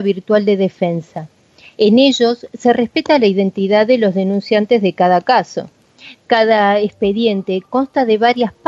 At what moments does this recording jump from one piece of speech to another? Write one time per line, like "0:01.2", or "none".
none